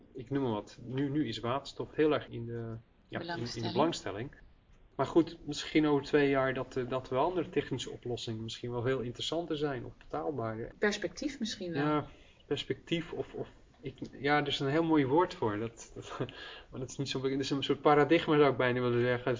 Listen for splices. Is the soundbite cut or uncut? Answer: cut